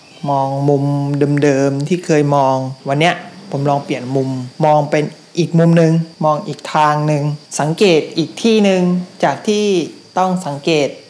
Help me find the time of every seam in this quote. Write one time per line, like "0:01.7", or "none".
0:06.1